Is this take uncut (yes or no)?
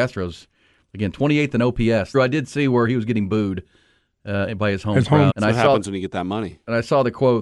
no